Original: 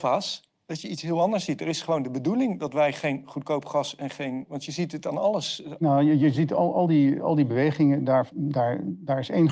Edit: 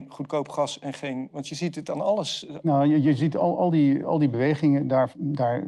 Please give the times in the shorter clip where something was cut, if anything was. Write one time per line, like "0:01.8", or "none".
none